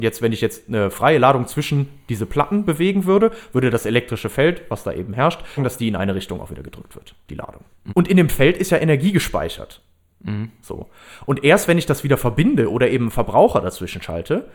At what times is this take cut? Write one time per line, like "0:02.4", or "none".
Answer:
0:05.6
0:07.9
0:10.1

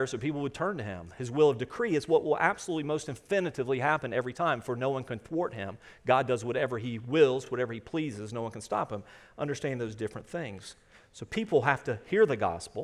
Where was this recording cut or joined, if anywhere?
none

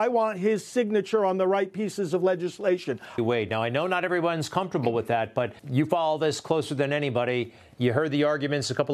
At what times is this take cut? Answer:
0:03.2
0:05.6

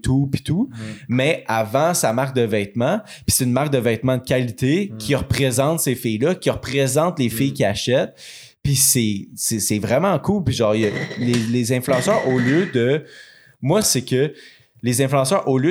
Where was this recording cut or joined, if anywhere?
0:13.8

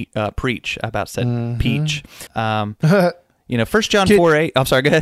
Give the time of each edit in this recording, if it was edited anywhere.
0:02.3

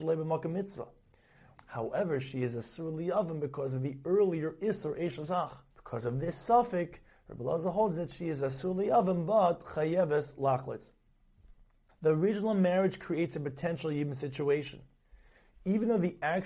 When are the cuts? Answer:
0:01.6
0:05.7
0:11.9

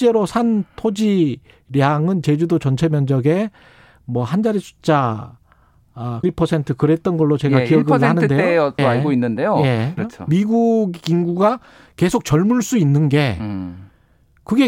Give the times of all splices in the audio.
0:06.2
0:08.8
0:10.0

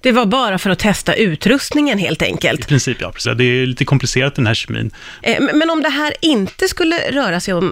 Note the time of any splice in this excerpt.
0:03.2
0:05.2

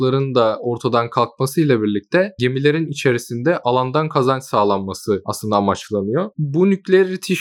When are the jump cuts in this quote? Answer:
0:06.3

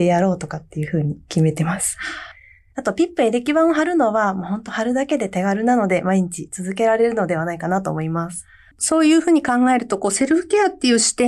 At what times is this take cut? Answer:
none

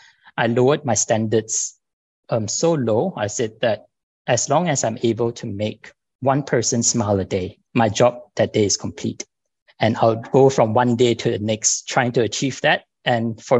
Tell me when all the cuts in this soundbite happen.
0:07.7

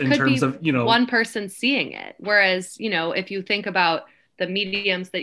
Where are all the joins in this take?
none

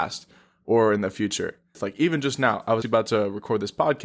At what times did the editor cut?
0:01.7
0:02.8

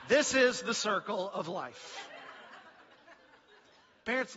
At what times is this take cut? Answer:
none

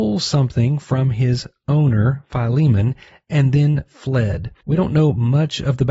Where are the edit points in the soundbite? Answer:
none

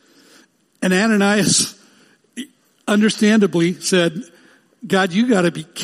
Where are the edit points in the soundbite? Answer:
none

